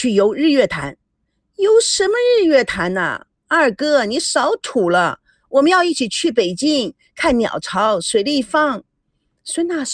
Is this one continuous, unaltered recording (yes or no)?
yes